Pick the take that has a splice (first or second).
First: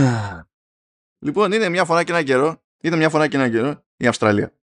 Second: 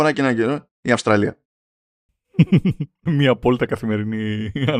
second